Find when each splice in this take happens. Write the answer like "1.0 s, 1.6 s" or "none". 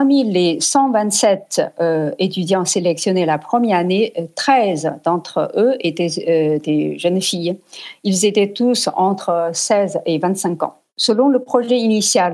none